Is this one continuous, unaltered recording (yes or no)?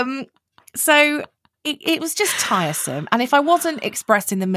yes